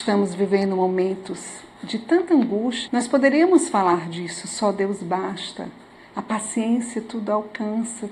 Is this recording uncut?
no; 1 cut; at 2.9 s

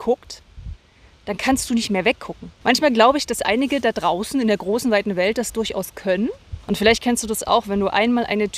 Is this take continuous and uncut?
no; 2 cuts; at 2.6 s, 6.6 s

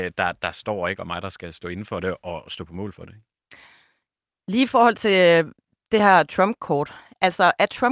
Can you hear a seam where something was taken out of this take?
no; 0 cuts

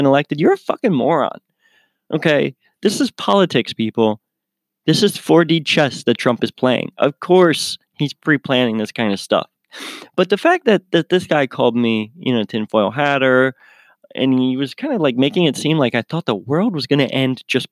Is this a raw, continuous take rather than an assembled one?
yes; 0 cuts

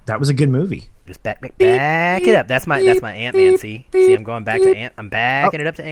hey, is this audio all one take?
no; 1 cut; at 1.1 s

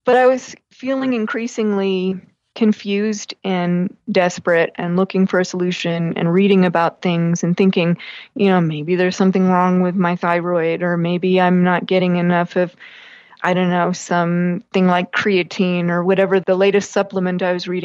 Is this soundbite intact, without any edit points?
yes; 0 cuts

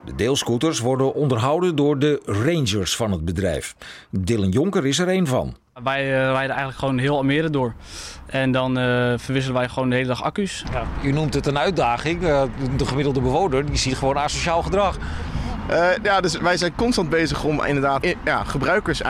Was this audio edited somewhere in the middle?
yes; 2 cuts; at 10.6 s, 18.0 s

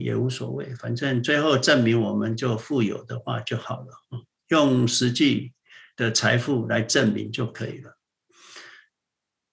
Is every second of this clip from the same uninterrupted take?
yes; 0 cuts

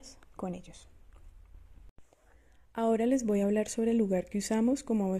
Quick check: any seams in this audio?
no; 0 cuts

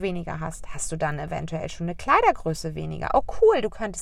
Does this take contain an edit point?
no; 0 cuts

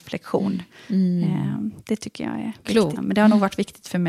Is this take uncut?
no; 1 cut; at 3.0 s

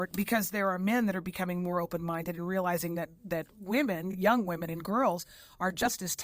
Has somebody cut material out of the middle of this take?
no; 0 cuts

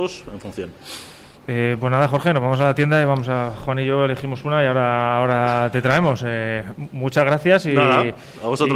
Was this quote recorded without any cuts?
yes; 0 cuts

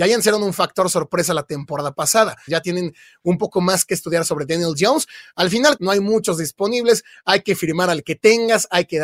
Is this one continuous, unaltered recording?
no; 2 cuts; at 2.5 s, 5.8 s

